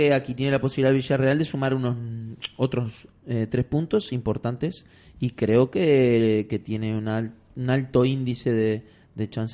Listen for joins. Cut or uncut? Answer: uncut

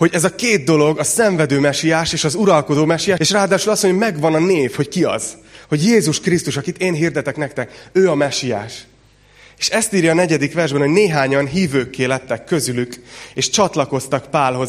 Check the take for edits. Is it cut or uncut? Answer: cut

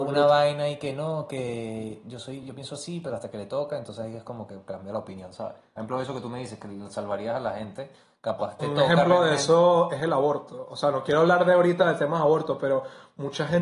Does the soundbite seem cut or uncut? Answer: uncut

